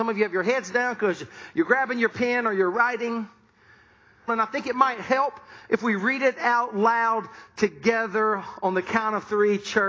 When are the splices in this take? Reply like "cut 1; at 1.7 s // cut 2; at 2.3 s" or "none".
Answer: cut 1; at 4.3 s